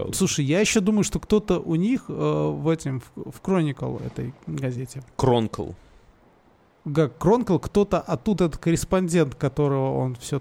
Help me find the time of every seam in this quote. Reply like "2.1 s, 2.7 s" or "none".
8.4 s